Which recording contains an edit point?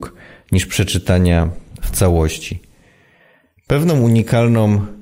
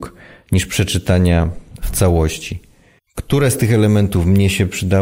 second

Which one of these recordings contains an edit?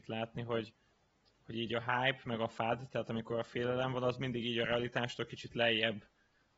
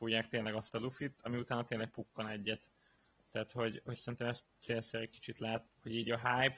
second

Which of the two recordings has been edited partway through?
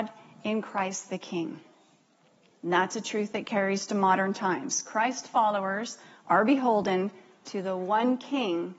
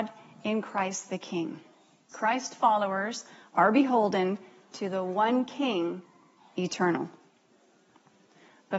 second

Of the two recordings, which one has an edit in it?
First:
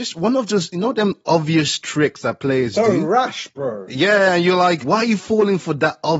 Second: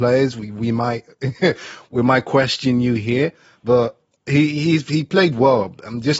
first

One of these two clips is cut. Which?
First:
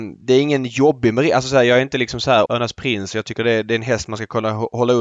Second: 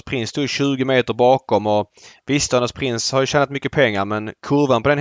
first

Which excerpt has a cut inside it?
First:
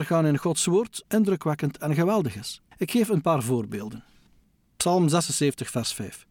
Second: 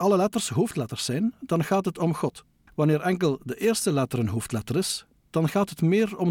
first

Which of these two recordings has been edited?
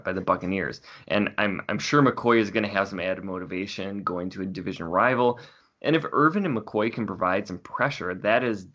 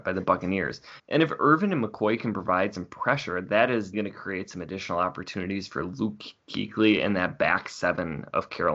second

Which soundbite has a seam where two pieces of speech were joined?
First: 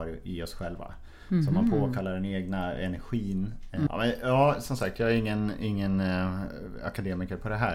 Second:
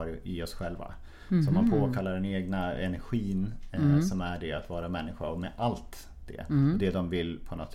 first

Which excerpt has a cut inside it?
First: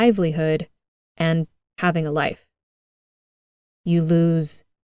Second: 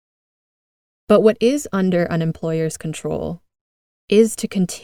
first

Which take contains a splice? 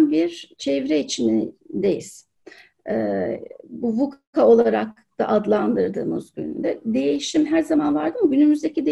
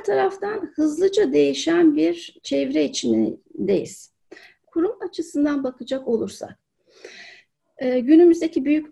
second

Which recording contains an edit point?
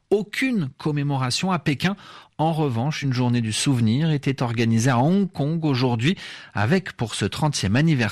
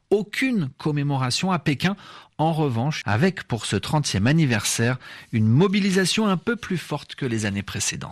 second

